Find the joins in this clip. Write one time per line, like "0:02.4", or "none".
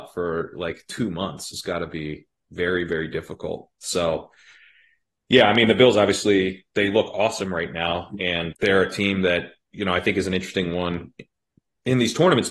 0:08.5